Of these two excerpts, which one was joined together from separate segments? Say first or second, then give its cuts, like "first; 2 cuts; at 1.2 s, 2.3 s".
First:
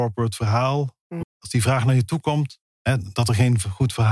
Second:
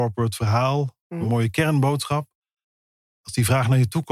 first; 2 cuts; at 1.2 s, 2.6 s